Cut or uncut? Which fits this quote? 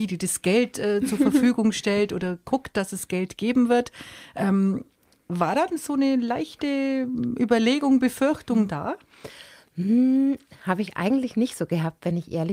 uncut